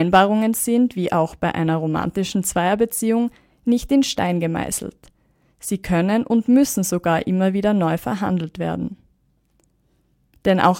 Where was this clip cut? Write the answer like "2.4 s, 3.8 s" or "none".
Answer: none

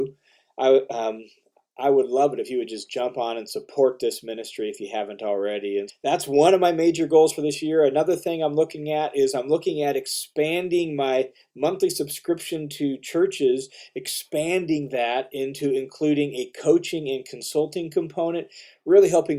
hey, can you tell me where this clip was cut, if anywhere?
5.9 s

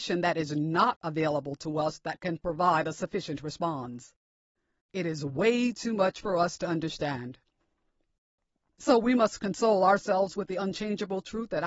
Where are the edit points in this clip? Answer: 4.8 s

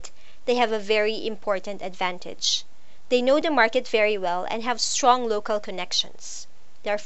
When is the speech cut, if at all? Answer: none

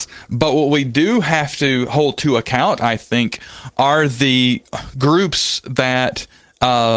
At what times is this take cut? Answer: none

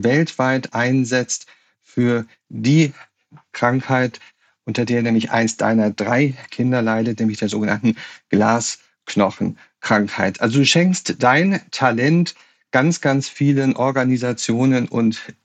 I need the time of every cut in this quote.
none

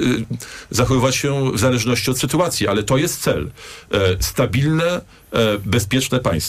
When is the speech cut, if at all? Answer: none

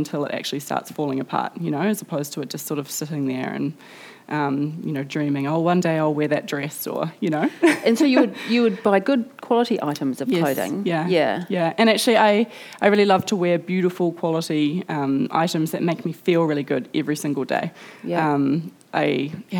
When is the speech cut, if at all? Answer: none

